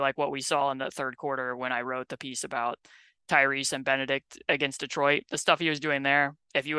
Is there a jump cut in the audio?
no; 0 cuts

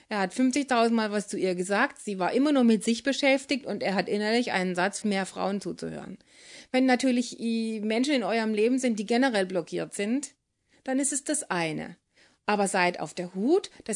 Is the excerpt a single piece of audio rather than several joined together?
no; 1 cut; at 5.0 s

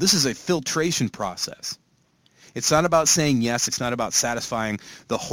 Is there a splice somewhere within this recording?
yes; 1 cut; at 3.7 s

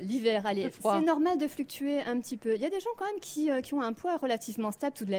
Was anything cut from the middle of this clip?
no; 0 cuts

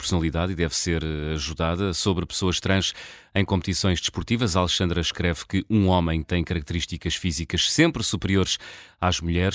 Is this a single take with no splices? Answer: yes; 0 cuts

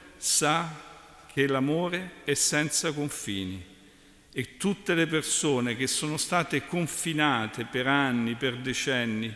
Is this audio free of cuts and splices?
yes; 0 cuts

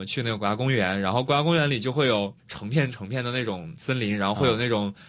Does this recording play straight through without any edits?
no; 1 cut; at 2.4 s

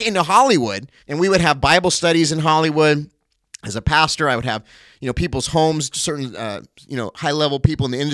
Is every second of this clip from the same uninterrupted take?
no; 1 cut; at 1.0 s

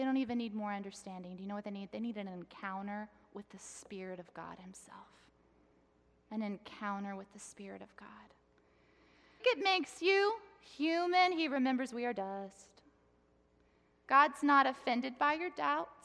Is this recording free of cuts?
no; 1 cut; at 9.4 s

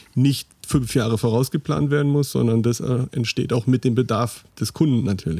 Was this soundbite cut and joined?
yes; 1 cut; at 4.5 s

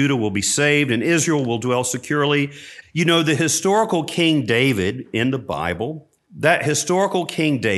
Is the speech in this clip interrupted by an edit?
yes; 2 cuts; at 2.8 s, 6.2 s

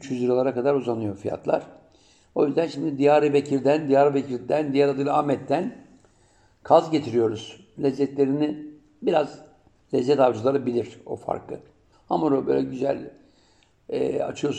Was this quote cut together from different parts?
yes; 1 cut; at 11.9 s

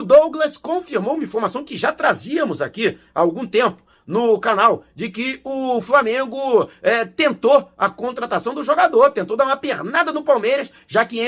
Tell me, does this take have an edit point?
no; 0 cuts

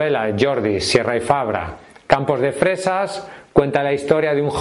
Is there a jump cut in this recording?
no; 0 cuts

